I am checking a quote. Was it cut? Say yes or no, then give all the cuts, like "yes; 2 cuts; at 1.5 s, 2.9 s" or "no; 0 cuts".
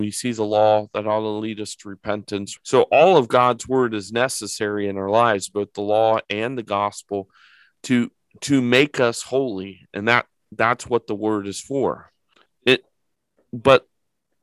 yes; 2 cuts; at 2.6 s, 12.5 s